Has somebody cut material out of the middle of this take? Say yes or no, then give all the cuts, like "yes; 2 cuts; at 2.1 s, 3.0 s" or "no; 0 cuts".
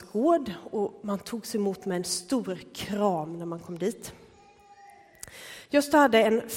no; 0 cuts